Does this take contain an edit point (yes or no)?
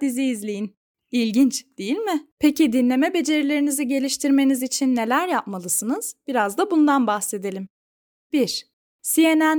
yes